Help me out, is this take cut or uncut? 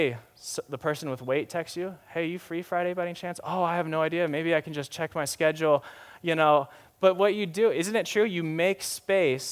uncut